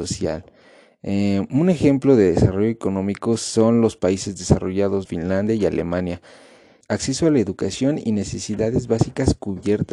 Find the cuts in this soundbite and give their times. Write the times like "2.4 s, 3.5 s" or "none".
5.0 s, 6.8 s